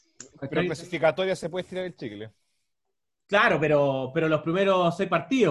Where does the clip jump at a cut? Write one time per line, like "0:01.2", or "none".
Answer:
none